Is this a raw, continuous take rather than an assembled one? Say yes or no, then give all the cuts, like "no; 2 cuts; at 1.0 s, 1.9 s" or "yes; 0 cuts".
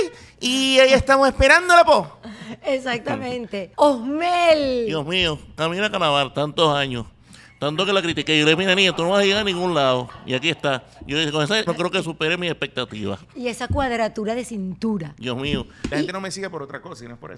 no; 3 cuts; at 3.7 s, 11.7 s, 15.9 s